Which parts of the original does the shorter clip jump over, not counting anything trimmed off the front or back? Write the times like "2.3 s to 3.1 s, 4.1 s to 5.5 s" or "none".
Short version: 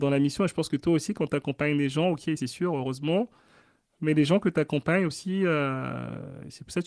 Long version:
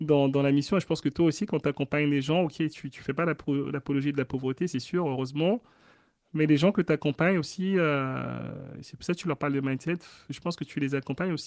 2.7 s to 4.7 s